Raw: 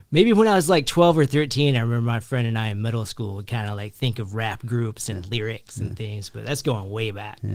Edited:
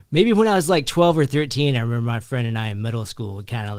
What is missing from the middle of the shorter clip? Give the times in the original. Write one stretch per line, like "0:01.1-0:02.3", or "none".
none